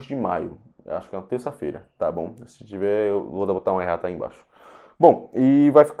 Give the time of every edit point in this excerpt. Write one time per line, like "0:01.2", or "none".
none

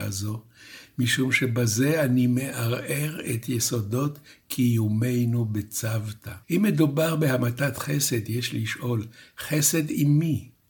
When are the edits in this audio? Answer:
0:06.4

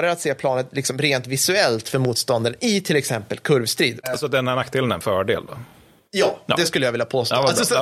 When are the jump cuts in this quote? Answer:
none

